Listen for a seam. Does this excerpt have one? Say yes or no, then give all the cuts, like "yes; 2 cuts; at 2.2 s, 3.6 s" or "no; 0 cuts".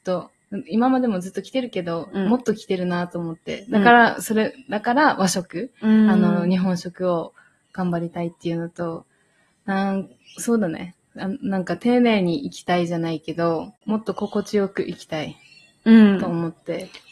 no; 0 cuts